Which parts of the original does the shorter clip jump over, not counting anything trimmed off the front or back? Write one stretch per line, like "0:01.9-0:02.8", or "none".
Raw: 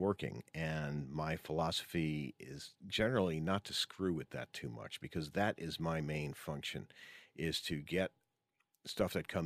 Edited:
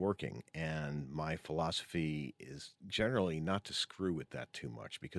none